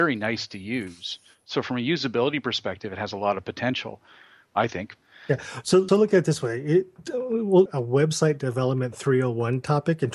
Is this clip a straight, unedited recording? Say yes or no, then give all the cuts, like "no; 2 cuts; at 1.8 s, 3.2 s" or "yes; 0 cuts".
no; 2 cuts; at 5.9 s, 7.7 s